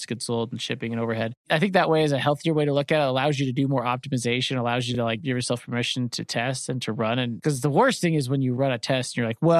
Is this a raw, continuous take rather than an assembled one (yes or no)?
yes